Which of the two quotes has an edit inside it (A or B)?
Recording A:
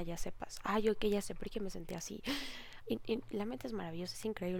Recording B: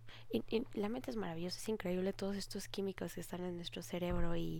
A